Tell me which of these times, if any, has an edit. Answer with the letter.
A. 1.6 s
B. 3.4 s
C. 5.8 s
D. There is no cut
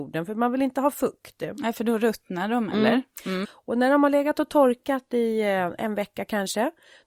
B